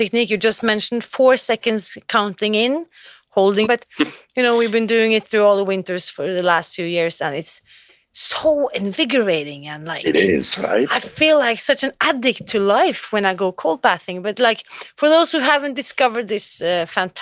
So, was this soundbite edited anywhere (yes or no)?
yes